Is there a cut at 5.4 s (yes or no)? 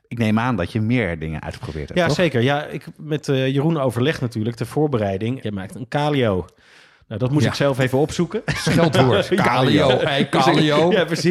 yes